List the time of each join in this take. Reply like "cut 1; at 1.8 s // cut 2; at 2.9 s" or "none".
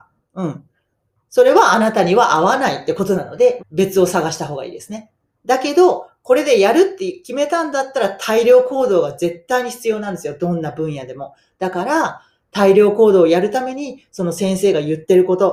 cut 1; at 3.6 s